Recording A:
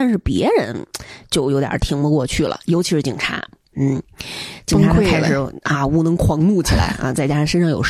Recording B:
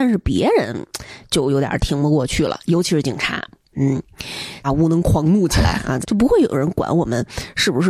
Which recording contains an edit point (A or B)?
B